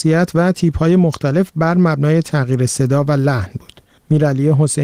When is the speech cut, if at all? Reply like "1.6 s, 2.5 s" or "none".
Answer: none